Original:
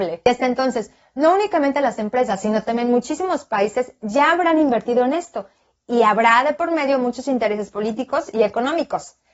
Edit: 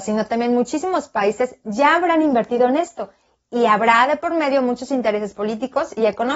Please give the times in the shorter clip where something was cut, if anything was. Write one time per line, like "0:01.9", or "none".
none